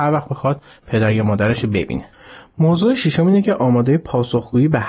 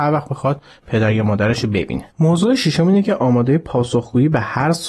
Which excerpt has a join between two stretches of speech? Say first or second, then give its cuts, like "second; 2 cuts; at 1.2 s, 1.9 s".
second; 1 cut; at 2.1 s